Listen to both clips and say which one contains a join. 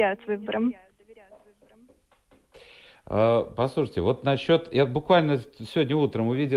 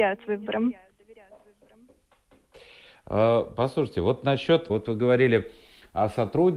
second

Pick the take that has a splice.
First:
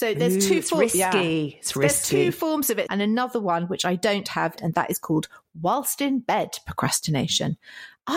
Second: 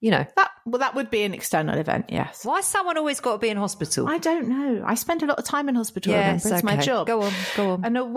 first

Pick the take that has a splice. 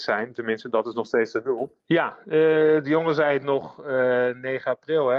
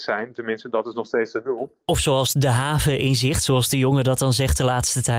first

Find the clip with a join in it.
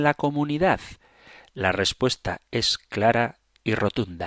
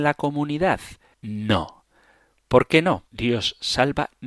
second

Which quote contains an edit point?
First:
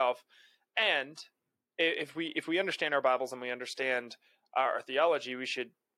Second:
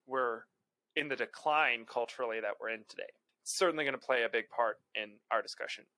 second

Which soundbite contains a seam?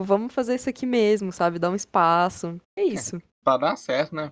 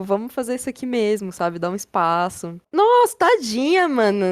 second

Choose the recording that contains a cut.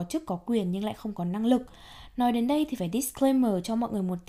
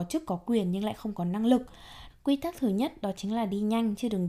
second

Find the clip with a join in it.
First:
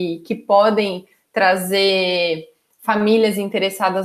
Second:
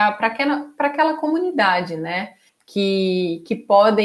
second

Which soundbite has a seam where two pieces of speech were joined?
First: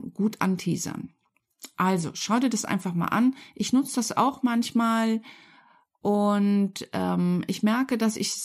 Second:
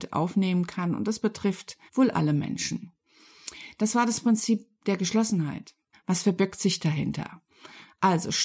second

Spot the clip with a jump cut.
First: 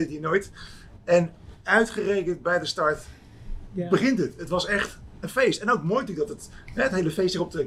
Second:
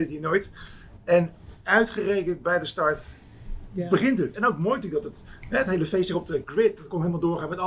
second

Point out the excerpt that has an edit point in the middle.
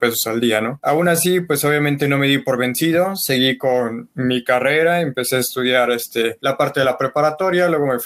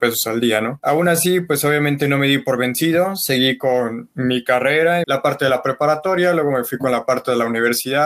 second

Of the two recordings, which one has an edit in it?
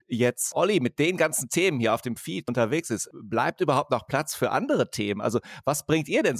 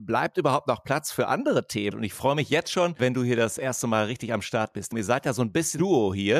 second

